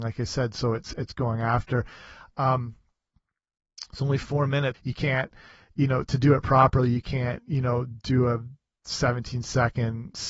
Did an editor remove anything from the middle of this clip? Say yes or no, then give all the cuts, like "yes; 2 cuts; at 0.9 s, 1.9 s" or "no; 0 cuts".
yes; 1 cut; at 4.7 s